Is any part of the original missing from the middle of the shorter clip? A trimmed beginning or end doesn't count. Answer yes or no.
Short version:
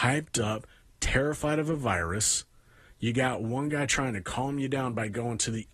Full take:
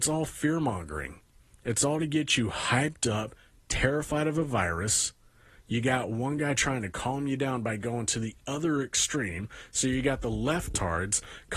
no